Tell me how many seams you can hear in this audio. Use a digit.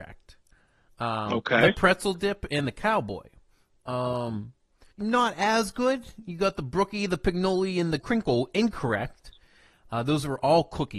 2